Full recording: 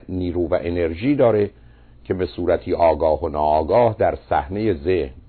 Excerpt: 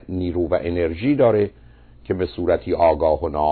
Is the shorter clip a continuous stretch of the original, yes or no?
yes